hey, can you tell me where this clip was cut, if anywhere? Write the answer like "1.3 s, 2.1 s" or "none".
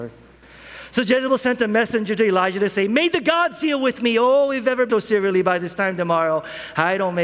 4.9 s